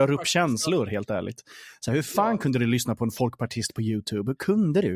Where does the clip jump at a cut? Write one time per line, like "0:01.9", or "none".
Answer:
none